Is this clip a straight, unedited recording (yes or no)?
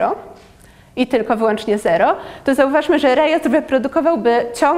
yes